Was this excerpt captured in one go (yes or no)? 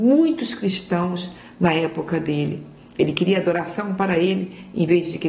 yes